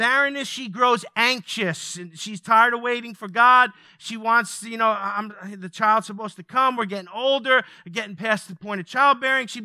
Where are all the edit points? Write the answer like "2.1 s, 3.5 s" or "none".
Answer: none

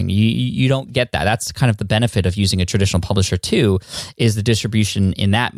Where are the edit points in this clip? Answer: none

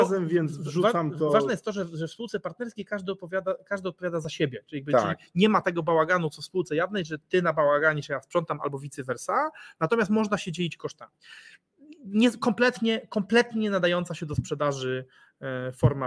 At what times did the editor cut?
none

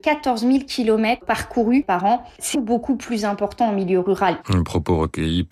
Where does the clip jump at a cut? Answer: 2.5 s, 4.4 s

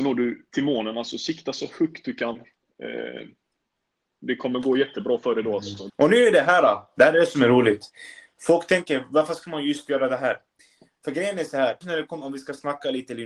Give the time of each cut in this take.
5.9 s, 11.8 s

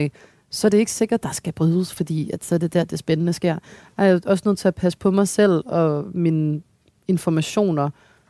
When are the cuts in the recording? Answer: 1.2 s

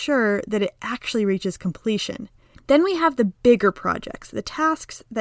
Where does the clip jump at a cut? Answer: 2.5 s

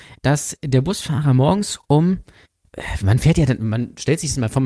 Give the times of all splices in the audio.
none

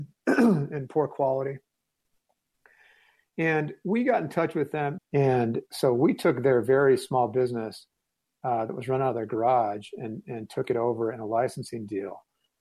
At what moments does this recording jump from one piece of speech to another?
5.0 s

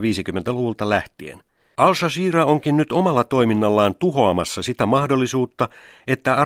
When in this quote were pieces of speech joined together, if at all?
1.8 s

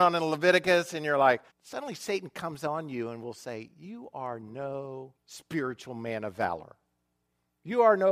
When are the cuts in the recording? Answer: 1.5 s, 5.2 s

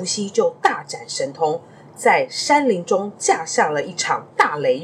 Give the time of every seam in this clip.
none

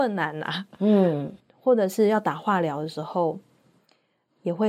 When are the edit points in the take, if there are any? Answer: 1.4 s

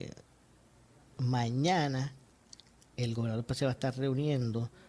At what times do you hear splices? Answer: none

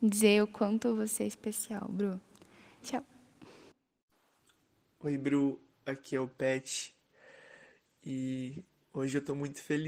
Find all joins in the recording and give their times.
2.8 s

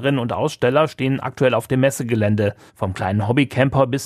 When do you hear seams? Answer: 2.7 s

